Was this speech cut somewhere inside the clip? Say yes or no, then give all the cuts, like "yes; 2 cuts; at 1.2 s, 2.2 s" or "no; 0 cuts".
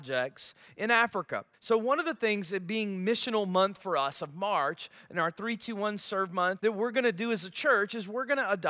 yes; 2 cuts; at 1.5 s, 6.6 s